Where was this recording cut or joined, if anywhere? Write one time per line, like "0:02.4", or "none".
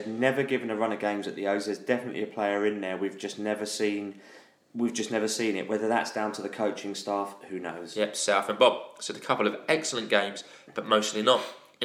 none